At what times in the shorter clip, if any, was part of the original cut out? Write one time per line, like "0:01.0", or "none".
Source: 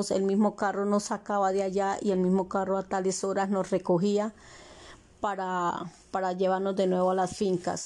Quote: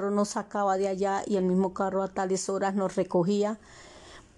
none

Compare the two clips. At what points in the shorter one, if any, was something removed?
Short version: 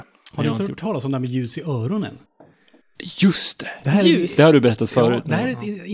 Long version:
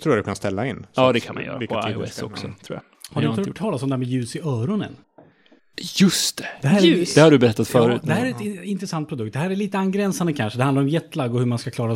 none

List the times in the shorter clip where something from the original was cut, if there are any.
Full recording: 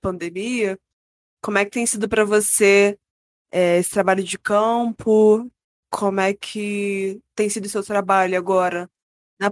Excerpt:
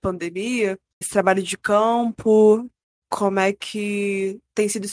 0:01.0

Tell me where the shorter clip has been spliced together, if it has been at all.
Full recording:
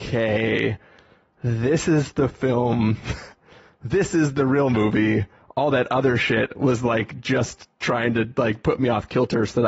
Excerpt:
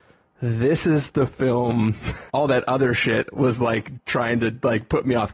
0:02.3
0:04.0

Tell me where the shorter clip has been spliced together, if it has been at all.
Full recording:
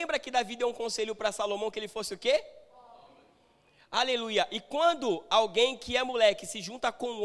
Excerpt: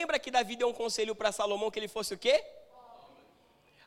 none

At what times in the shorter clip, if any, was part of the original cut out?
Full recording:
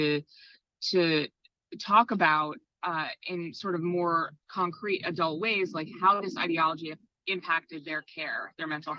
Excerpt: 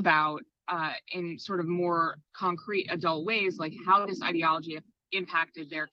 none

